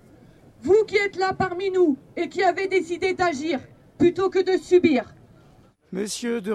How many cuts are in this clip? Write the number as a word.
one